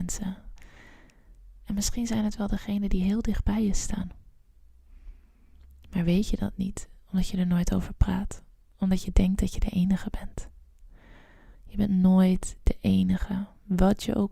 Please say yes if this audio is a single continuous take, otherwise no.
no